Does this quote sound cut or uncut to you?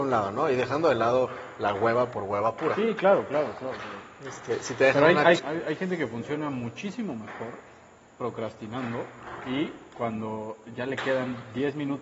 cut